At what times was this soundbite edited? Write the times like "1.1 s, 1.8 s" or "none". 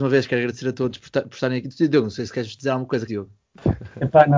3.1 s